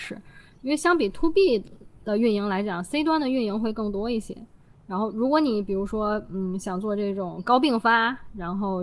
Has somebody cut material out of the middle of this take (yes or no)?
no